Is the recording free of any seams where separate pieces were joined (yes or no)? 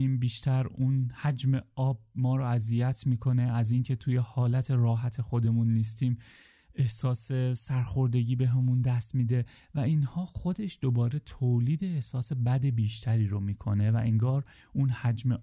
yes